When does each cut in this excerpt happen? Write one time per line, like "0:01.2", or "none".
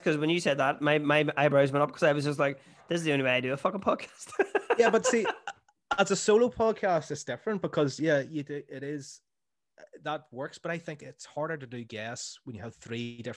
none